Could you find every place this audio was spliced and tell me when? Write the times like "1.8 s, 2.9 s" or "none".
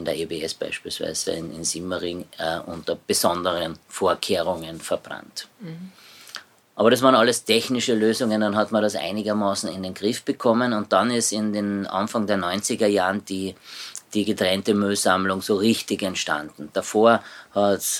none